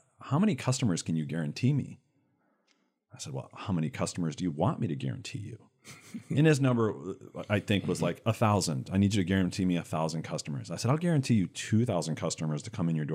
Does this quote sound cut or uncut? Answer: uncut